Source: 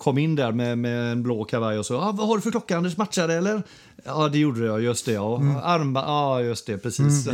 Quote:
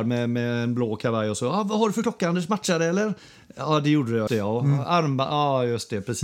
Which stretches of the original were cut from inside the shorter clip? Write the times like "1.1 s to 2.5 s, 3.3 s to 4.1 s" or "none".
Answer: 4.8 s to 5.0 s